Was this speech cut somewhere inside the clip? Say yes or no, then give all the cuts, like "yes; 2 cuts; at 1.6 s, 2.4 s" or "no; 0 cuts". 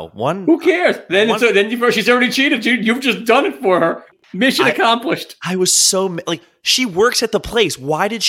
no; 0 cuts